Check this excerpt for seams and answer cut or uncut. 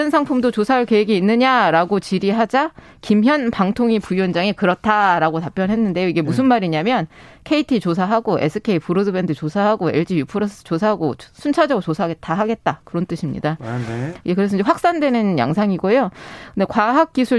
uncut